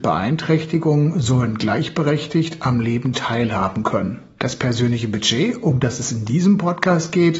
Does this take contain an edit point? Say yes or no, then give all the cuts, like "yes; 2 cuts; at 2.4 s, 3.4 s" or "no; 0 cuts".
no; 0 cuts